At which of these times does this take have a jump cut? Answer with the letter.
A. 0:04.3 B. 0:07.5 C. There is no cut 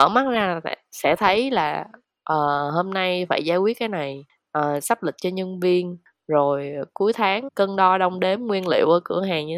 B